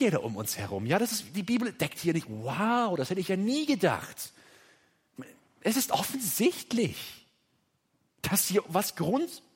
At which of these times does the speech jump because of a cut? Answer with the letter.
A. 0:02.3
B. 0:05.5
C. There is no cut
C